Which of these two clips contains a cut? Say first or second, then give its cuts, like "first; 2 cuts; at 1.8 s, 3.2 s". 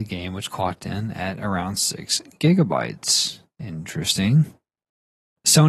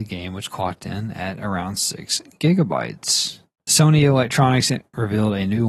second; 1 cut; at 3.6 s